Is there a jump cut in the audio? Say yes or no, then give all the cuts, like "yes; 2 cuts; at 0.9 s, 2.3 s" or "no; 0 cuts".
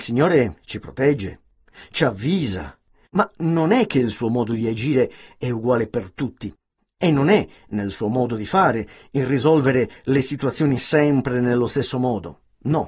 yes; 1 cut; at 3.0 s